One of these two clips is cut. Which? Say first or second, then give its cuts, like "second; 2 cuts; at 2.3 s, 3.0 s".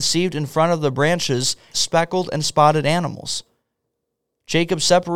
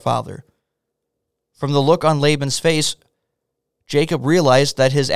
first; 1 cut; at 1.7 s